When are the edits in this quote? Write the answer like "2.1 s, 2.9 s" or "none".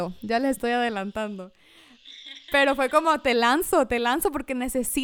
none

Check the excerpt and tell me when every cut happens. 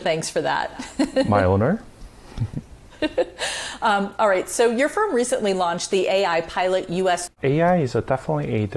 7.3 s

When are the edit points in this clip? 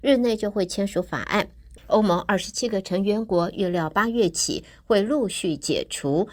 1.8 s

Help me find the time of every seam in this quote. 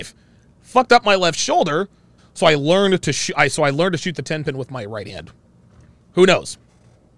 2.2 s, 6.0 s

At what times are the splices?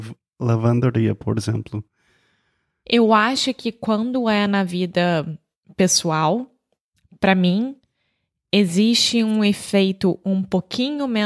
none

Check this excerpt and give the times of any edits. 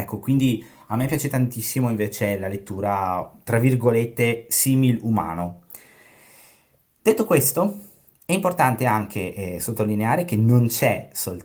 none

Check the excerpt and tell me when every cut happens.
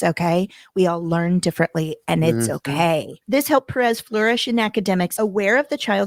3.2 s, 5.2 s

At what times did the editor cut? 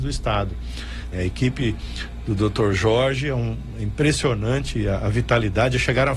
1.1 s

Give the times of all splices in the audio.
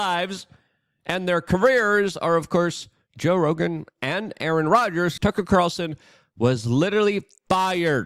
5.2 s

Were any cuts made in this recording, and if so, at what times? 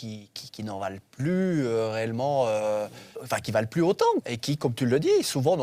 3.1 s, 4.2 s

